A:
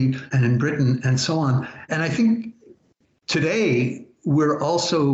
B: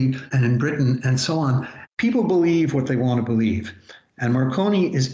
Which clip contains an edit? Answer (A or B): B